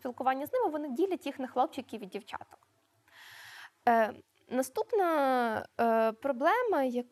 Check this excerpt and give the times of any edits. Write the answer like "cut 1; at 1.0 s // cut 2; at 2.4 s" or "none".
none